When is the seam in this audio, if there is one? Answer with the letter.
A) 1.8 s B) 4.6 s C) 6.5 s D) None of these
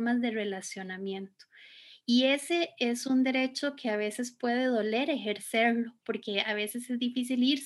D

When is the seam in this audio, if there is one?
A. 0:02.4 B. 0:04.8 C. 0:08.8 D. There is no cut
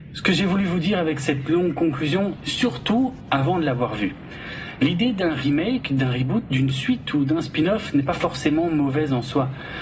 A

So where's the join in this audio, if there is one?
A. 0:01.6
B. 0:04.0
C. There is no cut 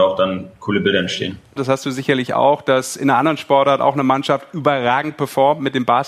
A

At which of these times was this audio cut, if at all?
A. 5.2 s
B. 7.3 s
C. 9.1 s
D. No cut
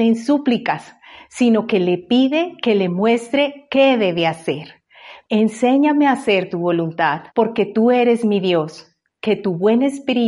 B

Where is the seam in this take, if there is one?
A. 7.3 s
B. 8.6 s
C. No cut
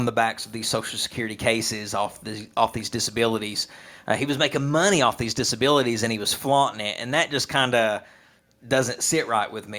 C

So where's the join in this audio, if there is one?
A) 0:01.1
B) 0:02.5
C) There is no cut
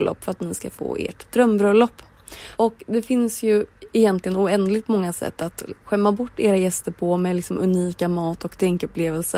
B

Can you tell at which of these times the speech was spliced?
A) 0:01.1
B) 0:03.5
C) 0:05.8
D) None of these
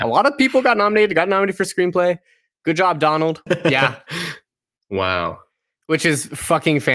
B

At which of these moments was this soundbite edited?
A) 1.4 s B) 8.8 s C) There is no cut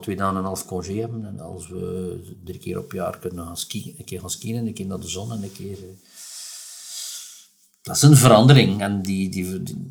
A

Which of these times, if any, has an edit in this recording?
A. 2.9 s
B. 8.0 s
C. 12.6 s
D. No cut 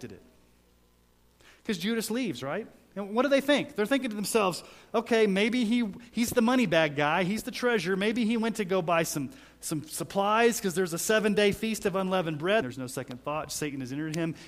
C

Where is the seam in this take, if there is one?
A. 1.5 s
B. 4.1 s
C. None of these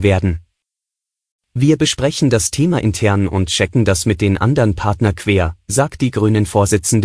C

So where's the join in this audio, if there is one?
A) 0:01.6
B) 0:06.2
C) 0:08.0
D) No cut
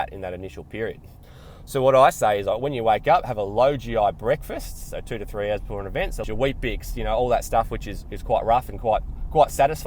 B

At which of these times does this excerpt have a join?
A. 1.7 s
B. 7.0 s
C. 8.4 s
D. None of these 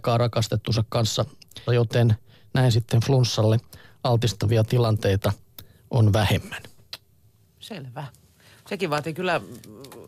A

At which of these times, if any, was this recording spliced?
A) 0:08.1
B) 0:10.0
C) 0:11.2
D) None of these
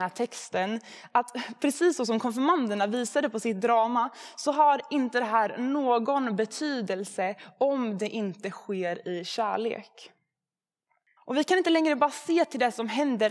C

